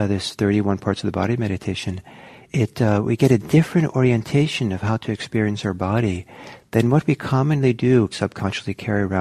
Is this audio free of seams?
no; 2 cuts; at 2.5 s, 8.1 s

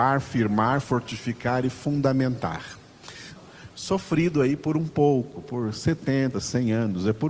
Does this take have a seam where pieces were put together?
yes; 2 cuts; at 3.4 s, 6.3 s

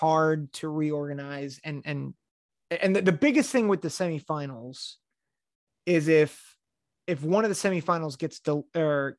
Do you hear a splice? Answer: no; 0 cuts

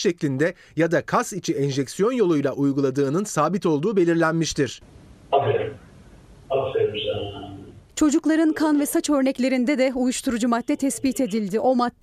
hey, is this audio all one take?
yes; 0 cuts

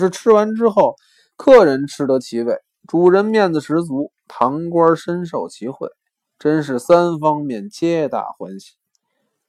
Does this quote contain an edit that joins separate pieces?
no; 0 cuts

